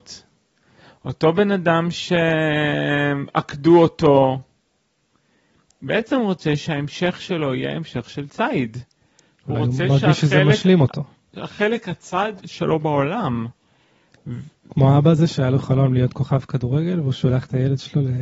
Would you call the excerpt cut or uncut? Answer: cut